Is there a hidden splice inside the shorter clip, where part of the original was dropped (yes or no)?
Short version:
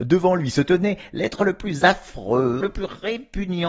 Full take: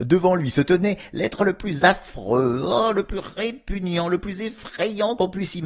yes